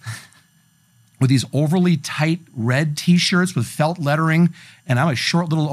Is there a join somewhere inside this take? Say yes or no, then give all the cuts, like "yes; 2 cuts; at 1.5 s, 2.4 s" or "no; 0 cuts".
no; 0 cuts